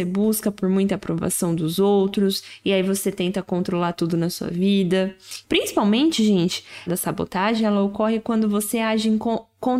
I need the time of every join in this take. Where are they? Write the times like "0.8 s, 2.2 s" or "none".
5.4 s, 6.9 s